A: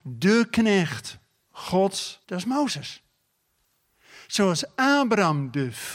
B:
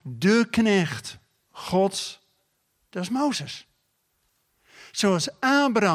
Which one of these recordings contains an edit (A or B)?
A